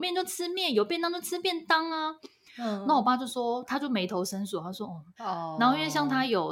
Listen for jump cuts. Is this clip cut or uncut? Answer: cut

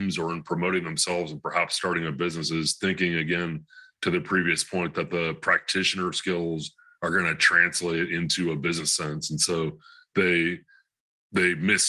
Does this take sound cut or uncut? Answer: uncut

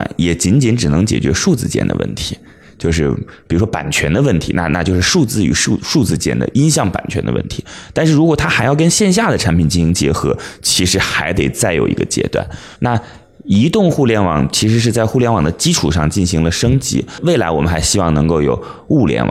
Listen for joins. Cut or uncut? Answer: cut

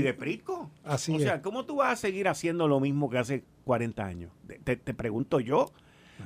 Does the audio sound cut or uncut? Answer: uncut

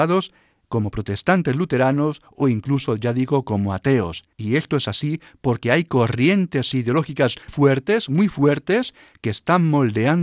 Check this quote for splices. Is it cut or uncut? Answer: cut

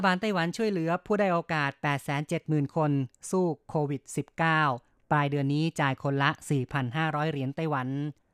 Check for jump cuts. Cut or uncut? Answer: uncut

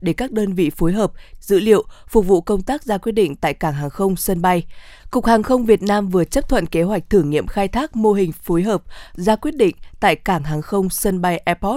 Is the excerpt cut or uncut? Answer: cut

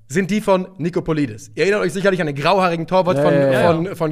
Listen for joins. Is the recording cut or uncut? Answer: uncut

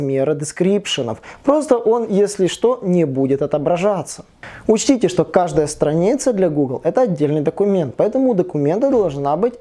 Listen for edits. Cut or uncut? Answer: uncut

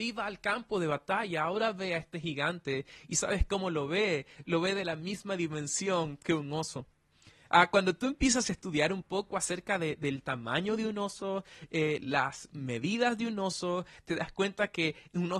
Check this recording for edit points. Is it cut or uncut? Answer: uncut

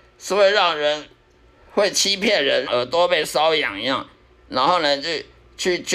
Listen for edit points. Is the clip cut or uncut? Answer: cut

